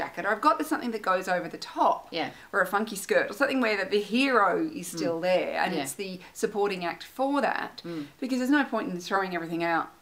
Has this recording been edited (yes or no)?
no